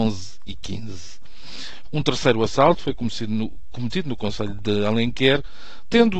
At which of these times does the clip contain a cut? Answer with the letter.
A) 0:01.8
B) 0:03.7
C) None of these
A